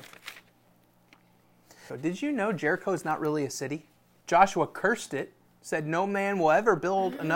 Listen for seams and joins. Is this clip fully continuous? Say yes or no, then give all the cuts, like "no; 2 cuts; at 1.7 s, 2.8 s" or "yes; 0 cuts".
no; 2 cuts; at 1.9 s, 4.2 s